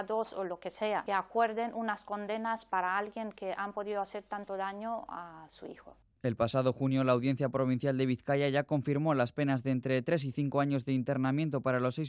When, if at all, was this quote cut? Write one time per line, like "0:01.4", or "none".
none